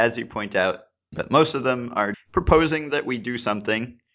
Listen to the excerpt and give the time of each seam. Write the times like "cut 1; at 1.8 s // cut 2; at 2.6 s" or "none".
cut 1; at 1.1 s // cut 2; at 2.1 s

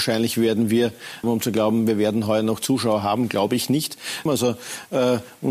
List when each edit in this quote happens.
cut 1; at 1.2 s // cut 2; at 4.3 s

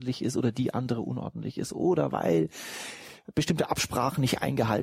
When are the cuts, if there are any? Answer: none

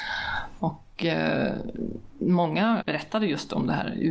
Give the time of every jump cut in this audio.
cut 1; at 2.8 s

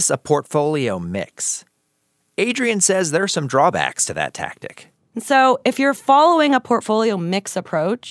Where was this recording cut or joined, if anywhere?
none

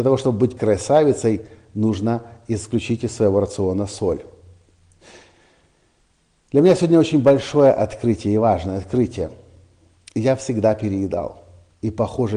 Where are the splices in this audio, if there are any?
none

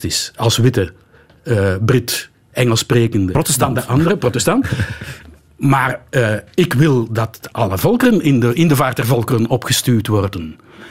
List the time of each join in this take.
cut 1; at 7.5 s

